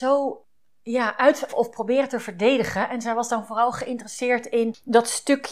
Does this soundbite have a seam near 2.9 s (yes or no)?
no